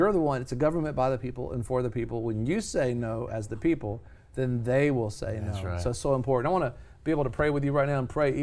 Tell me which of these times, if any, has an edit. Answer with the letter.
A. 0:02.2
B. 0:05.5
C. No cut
C